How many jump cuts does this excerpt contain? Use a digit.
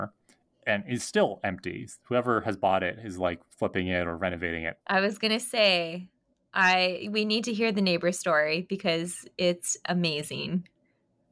1